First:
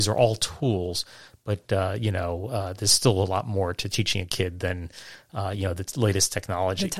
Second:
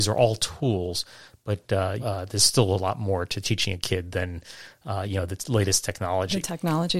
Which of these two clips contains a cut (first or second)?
second